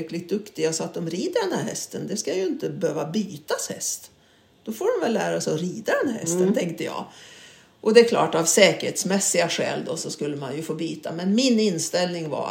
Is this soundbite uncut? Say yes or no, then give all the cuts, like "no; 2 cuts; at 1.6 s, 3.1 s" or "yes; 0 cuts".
yes; 0 cuts